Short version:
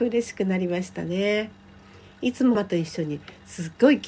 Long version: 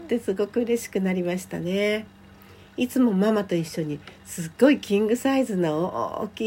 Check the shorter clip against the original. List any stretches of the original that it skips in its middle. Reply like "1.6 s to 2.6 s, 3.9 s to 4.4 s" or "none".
3.1 s to 3.3 s